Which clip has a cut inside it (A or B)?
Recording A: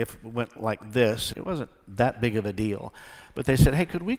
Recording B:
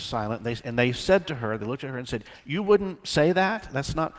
A